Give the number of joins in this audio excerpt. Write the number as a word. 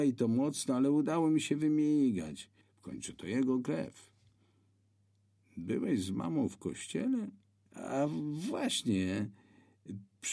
two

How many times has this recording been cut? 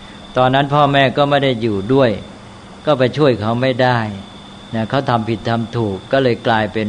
zero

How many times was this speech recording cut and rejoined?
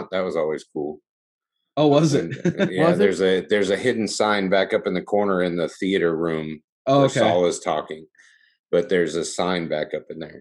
zero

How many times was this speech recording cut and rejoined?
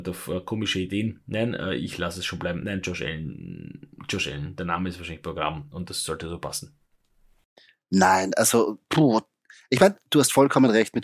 zero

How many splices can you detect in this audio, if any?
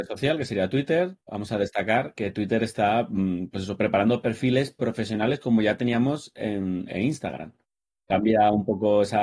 one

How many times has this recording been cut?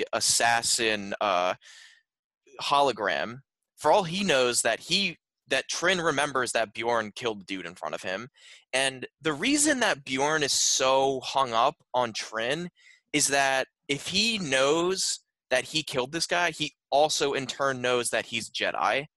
zero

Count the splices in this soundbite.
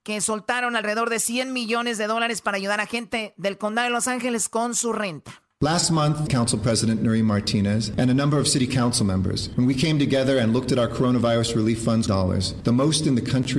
two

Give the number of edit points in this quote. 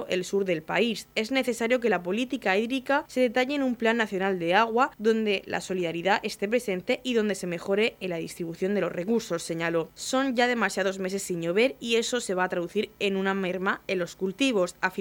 one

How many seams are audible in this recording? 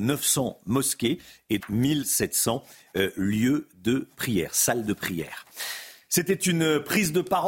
one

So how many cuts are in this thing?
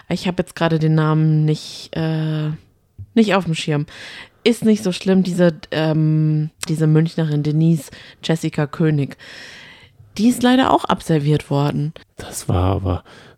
two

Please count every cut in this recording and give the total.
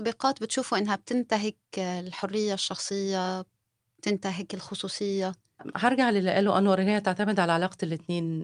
zero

